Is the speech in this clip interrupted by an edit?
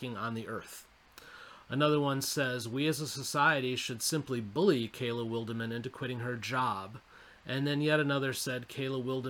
yes; 1 cut; at 1.6 s

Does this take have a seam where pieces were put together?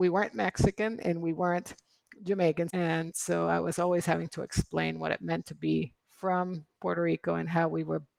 yes; 2 cuts; at 2.7 s, 6.0 s

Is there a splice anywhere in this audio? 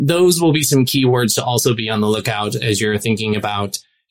no; 0 cuts

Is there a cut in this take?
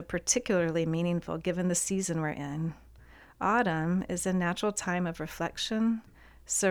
no; 0 cuts

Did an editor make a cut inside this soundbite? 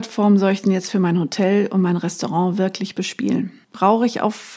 yes; 1 cut; at 3.6 s

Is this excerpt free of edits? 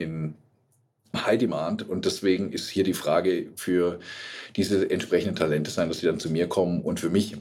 no; 1 cut; at 3.5 s

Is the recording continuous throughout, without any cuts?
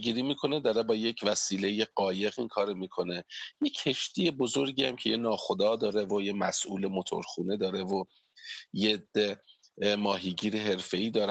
yes; 0 cuts

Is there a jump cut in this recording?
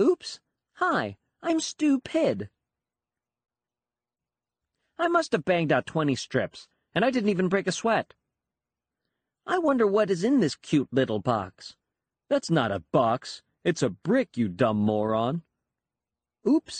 no; 0 cuts

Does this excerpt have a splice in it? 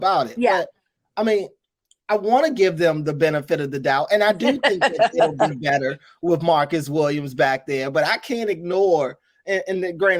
no; 0 cuts

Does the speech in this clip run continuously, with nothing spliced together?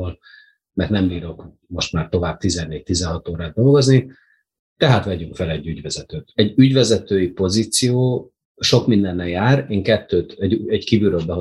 yes; 0 cuts

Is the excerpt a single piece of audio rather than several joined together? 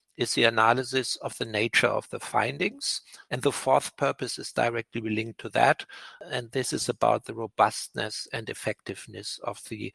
no; 1 cut; at 3.3 s

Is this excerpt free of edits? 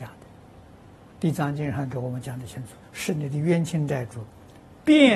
no; 2 cuts; at 1.1 s, 2.8 s

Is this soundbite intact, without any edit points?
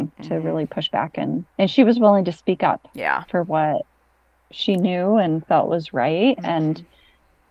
yes; 0 cuts

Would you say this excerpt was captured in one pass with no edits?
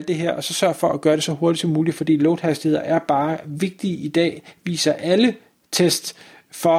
yes; 0 cuts

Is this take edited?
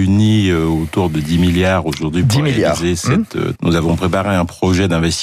yes; 1 cut; at 3.6 s

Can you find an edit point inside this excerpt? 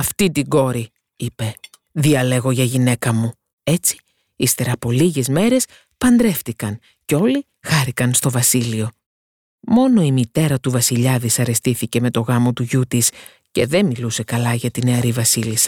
yes; 1 cut; at 3.5 s

